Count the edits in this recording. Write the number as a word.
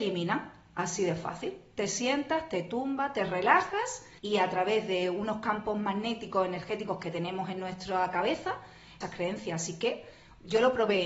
two